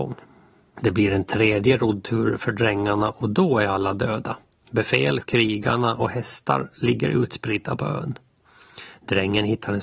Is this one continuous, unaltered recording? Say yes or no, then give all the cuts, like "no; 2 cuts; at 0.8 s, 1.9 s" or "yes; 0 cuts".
no; 1 cut; at 5.2 s